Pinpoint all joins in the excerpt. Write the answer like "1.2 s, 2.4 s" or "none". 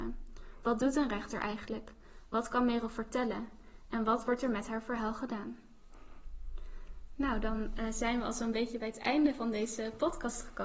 none